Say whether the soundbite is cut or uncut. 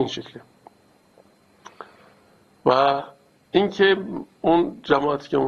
uncut